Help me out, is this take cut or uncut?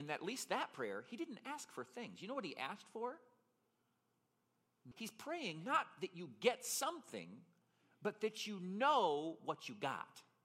cut